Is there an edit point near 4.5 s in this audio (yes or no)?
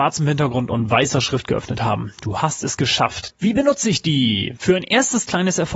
no